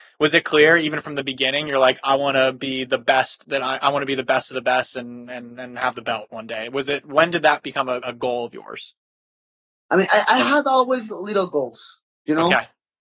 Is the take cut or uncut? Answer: uncut